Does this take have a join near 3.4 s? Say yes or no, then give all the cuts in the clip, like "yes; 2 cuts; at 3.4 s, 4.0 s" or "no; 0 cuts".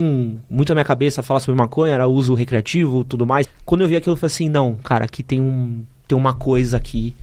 yes; 1 cut; at 3.4 s